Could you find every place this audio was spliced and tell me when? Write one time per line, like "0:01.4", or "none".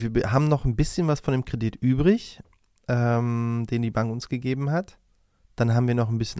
none